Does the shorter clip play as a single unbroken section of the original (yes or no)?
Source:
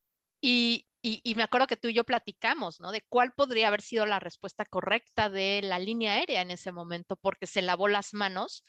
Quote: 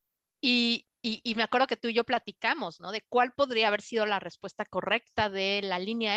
yes